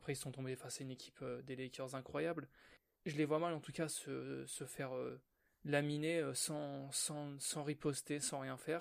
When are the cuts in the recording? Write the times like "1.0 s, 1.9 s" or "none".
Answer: 3.0 s